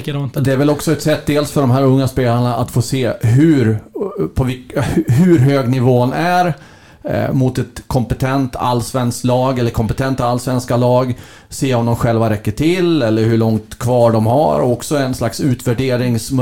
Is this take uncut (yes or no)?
yes